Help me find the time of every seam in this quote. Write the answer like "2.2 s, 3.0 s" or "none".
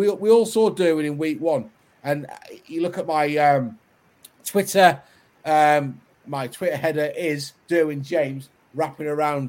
6.2 s